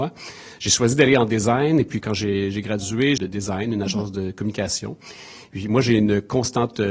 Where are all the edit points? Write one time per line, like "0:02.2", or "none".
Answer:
0:03.2